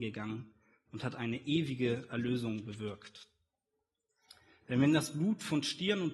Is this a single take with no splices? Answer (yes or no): yes